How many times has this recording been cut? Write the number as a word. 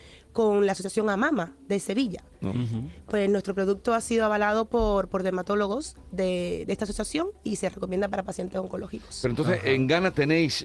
zero